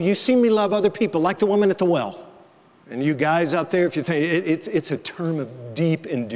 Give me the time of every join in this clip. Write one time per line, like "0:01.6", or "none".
0:02.8